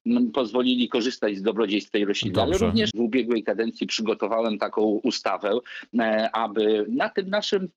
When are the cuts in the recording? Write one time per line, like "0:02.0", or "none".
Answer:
0:02.9